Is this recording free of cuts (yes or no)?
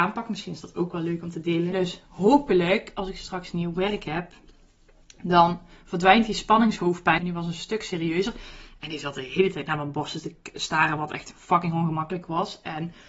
no